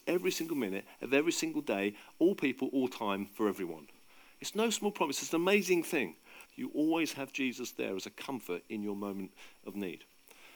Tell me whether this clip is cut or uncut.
cut